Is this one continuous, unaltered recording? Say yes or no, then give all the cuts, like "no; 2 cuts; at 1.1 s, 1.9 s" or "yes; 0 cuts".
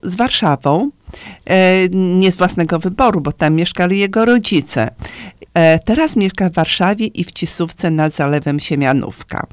no; 1 cut; at 5.5 s